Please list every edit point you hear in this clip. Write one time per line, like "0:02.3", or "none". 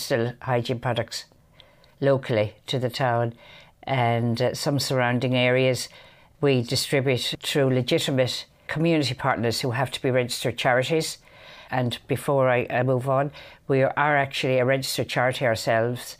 none